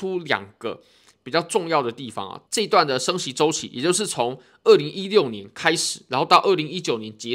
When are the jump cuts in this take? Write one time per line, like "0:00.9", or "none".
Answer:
0:02.5